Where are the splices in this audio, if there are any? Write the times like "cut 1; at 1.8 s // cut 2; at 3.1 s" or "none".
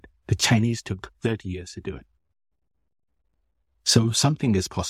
none